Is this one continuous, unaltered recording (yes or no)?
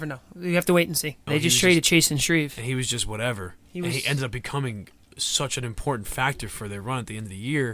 no